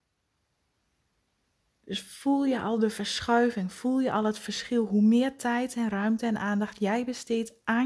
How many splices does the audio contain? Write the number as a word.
zero